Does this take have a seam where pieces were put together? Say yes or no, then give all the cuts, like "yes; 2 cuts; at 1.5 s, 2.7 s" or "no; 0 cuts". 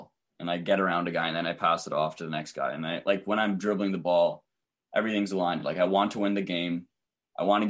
no; 0 cuts